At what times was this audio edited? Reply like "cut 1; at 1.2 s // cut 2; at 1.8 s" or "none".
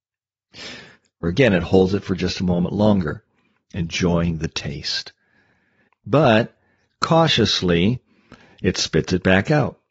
cut 1; at 1.2 s // cut 2; at 5.9 s